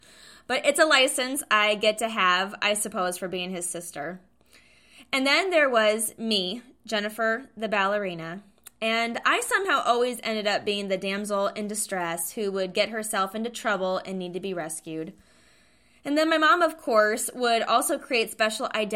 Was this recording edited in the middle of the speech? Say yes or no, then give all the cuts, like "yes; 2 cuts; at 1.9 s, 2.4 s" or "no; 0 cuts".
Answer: no; 0 cuts